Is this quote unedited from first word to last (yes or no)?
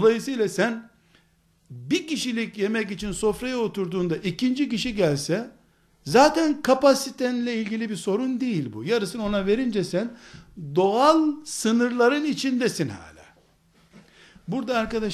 yes